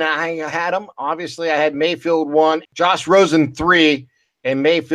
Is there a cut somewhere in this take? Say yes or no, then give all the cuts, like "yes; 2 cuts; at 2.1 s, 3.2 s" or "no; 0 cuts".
yes; 1 cut; at 2.6 s